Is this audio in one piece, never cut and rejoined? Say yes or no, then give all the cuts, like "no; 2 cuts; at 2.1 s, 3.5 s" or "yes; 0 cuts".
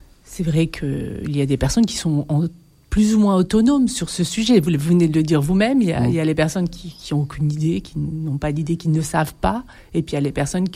yes; 0 cuts